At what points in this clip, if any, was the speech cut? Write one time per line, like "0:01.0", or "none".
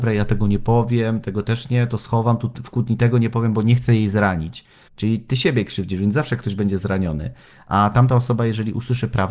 0:04.9

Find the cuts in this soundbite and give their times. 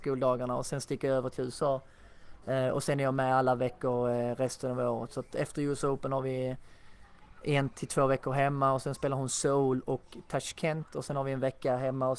none

